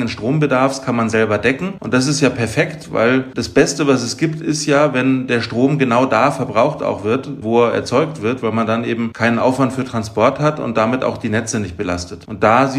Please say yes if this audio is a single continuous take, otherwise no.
yes